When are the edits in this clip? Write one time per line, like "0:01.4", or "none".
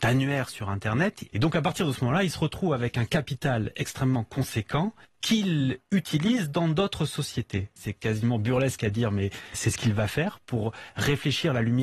0:01.3
0:07.8